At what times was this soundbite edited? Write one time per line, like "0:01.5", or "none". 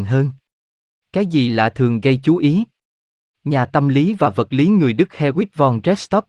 none

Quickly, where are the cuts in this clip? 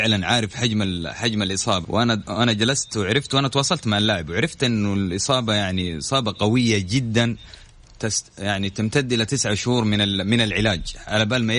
0:01.8

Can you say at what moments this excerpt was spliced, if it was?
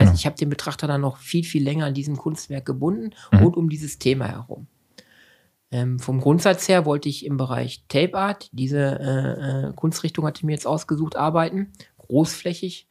none

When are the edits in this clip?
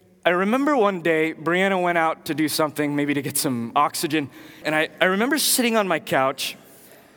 0:04.6

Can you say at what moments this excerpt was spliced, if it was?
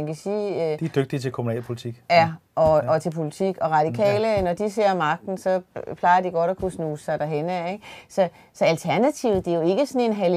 none

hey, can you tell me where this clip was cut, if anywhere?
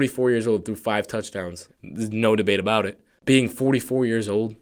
0:01.7

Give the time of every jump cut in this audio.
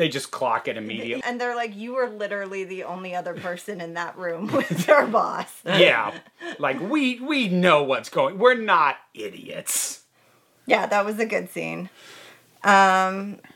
0:01.2

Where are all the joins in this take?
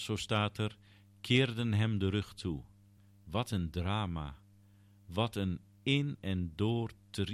none

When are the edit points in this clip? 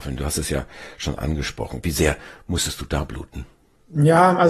0:01.8

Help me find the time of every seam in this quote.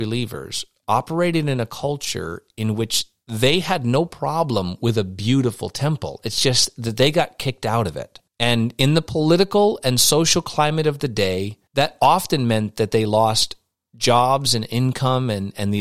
0:08.3
0:11.7

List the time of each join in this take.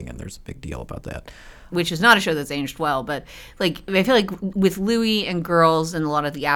0:01.7

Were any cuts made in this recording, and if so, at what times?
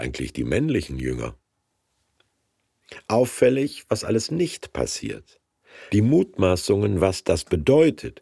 0:05.9

